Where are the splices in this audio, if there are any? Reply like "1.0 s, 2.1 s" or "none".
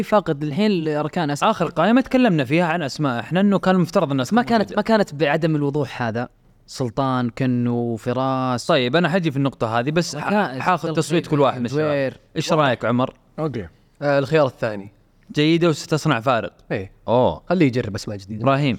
none